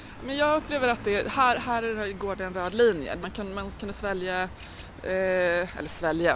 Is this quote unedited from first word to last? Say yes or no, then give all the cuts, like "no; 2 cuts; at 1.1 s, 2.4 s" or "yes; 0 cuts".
no; 1 cut; at 3.2 s